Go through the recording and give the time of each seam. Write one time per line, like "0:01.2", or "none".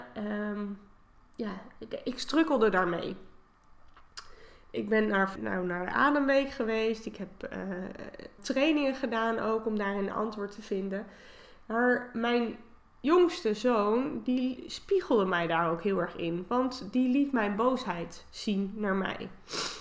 0:05.4
0:08.4